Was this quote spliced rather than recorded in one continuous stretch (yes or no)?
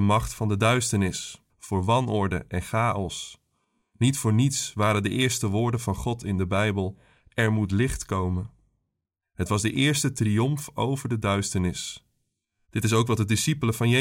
yes